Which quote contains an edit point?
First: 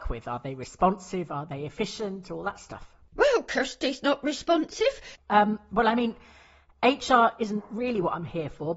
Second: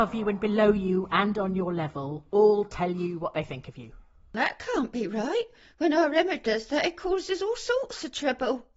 first; 1 cut; at 5.2 s

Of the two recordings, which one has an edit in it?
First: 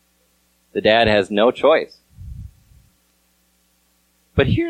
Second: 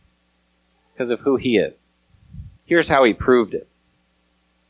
second; 1 cut; at 2.6 s

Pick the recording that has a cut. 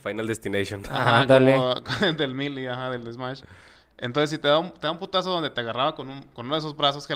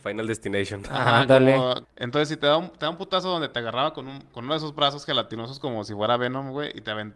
second; 1 cut; at 1.8 s

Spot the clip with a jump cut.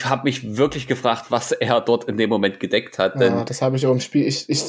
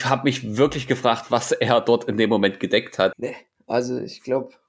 second; 1 cut; at 3.1 s

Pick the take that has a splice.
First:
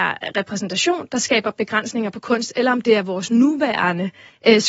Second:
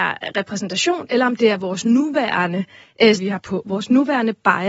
second; 2 cuts; at 1.1 s, 3.2 s

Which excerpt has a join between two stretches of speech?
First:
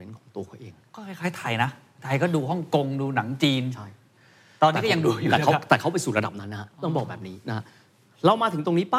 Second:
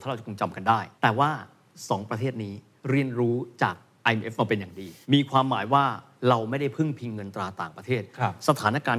second; 2 cuts; at 1.0 s, 5.0 s

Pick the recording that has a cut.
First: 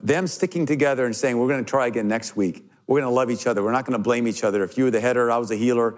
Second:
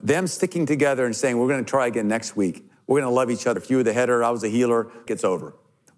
second; 2 cuts; at 3.6 s, 5.1 s

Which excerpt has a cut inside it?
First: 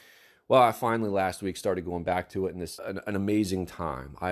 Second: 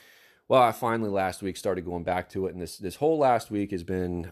first; 1 cut; at 2.8 s

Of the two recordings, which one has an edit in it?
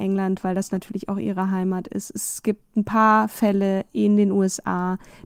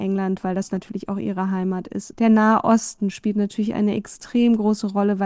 second; 1 cut; at 2.1 s

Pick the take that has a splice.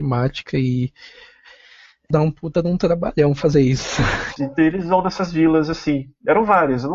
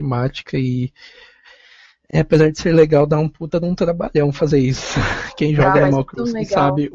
first; 2 cuts; at 2.1 s, 4.4 s

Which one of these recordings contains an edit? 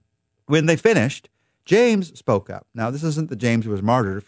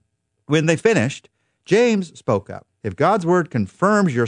second; 1 cut; at 2.7 s

